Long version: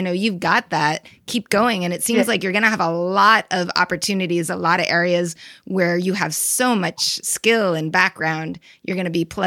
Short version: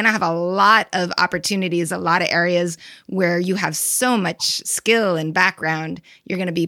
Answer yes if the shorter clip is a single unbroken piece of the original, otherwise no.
yes